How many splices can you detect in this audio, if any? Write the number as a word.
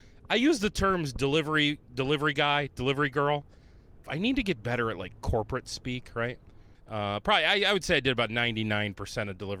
two